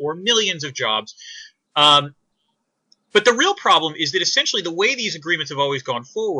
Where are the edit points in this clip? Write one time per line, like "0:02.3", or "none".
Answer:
0:01.7